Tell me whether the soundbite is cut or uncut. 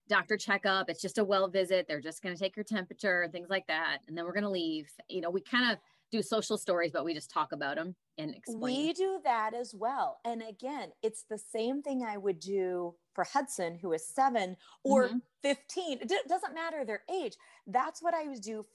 uncut